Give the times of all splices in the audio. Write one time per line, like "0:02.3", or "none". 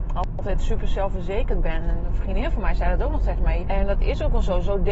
0:03.6

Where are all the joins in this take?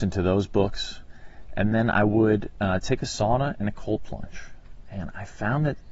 none

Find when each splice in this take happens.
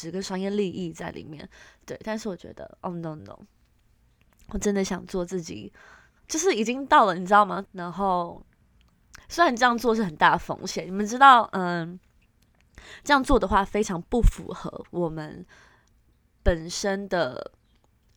0:03.2
0:07.6

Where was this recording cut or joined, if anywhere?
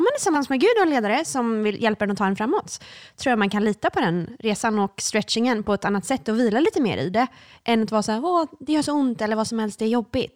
none

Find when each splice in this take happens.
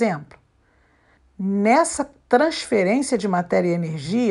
0:01.2

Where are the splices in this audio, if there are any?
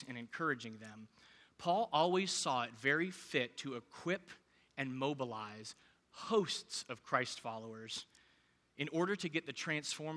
none

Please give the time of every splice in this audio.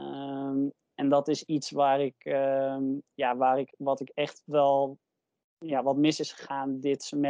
none

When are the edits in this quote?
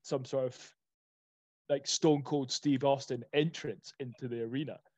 none

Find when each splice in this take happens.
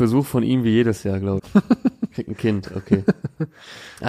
0:01.4

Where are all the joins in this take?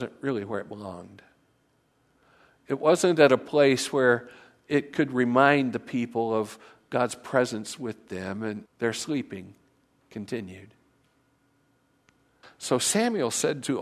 0:08.7
0:12.4

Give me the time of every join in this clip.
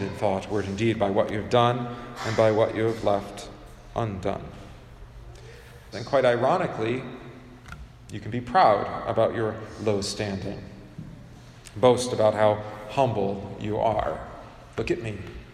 0:05.9

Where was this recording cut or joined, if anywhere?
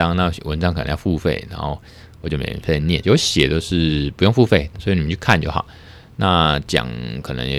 0:03.0
0:04.7

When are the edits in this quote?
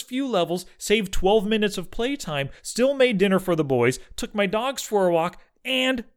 none

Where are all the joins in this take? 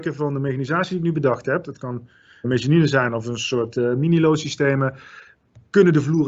0:02.4

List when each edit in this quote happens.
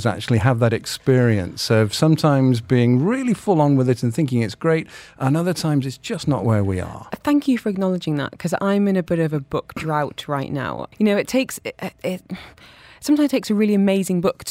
0:10.9
0:11.9

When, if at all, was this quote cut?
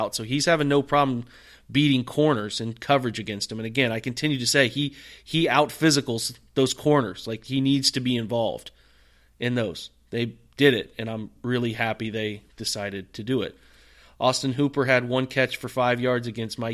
none

